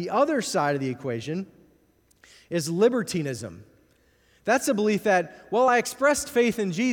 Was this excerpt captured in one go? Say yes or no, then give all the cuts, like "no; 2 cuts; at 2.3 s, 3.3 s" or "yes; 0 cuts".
yes; 0 cuts